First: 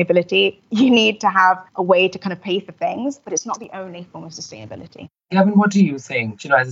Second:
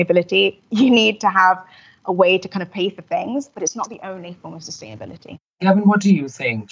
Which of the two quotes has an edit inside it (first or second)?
first